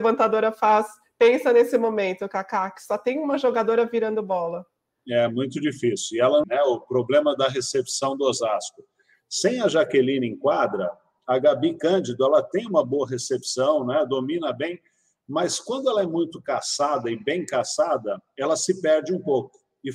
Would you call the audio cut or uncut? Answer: cut